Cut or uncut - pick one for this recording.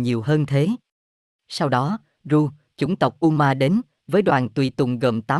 uncut